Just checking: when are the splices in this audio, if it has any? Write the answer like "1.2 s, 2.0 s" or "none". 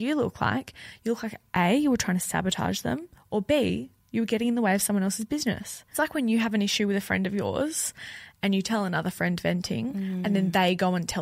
none

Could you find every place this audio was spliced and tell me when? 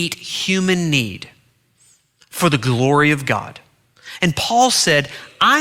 none

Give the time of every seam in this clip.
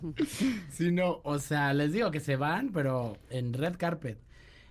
3.3 s

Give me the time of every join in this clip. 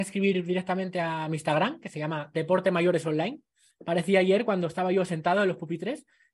3.7 s

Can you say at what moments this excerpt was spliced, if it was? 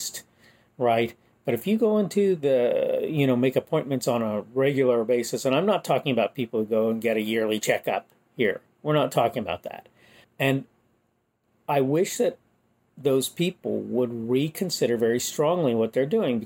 10.2 s

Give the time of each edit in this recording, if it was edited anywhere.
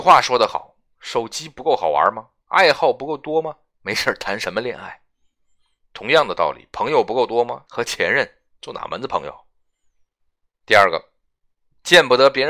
7.7 s, 10.5 s

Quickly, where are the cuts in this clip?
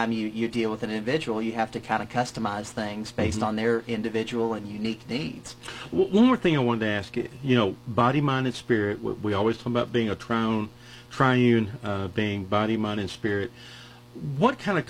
none

